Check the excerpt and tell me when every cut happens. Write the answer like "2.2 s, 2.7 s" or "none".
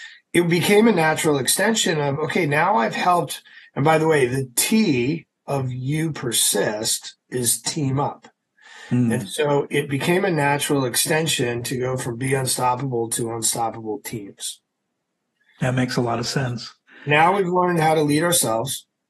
none